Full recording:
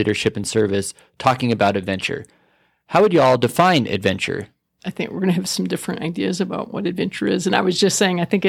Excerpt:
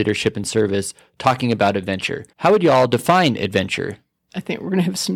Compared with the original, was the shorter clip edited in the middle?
yes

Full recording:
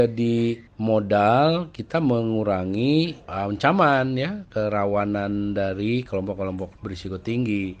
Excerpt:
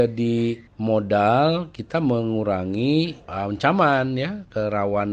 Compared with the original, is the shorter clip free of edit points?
yes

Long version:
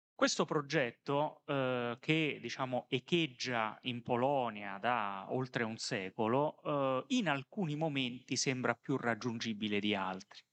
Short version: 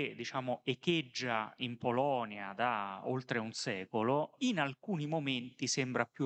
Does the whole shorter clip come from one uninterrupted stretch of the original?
no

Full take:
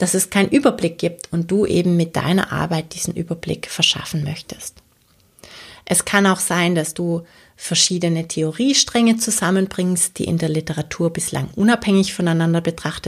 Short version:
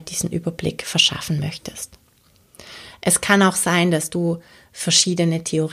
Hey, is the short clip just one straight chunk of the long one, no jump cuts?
yes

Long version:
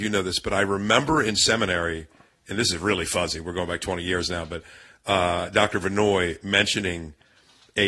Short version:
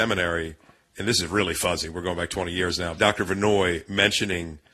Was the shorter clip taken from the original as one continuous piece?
no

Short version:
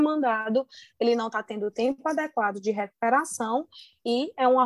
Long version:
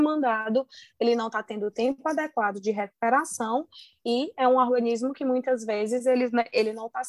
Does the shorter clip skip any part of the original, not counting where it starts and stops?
no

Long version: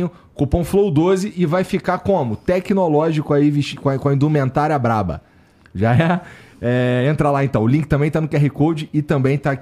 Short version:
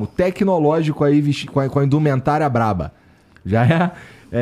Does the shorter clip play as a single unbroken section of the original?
yes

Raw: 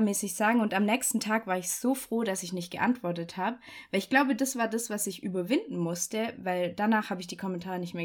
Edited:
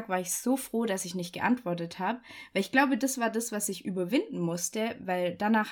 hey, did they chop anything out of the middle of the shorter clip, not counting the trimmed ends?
no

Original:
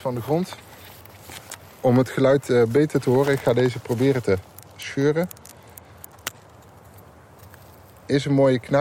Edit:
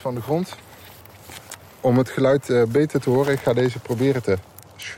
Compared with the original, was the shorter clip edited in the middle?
no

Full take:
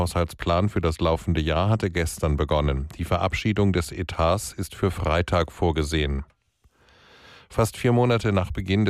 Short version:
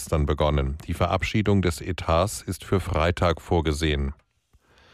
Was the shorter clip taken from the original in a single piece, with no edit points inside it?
yes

